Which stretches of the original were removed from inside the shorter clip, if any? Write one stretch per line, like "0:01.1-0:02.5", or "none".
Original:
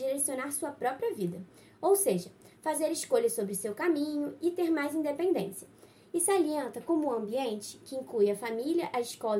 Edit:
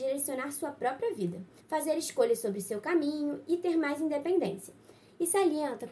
0:01.6-0:02.5